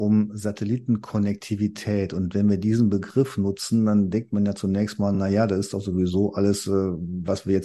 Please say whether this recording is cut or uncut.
uncut